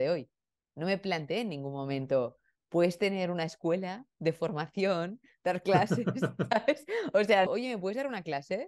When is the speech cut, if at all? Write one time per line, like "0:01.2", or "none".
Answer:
0:07.5